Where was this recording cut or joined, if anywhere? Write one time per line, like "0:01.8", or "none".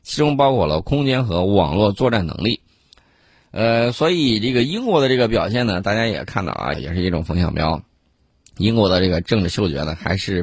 0:06.7